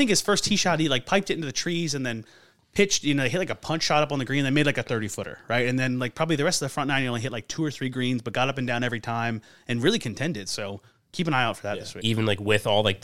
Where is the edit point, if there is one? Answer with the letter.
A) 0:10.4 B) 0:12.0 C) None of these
B